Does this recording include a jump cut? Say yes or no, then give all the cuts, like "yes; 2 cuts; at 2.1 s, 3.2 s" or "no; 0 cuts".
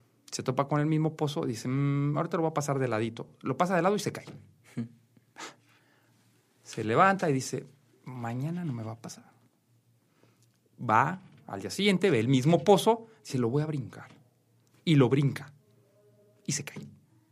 no; 0 cuts